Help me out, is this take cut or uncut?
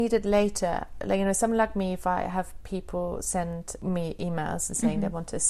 uncut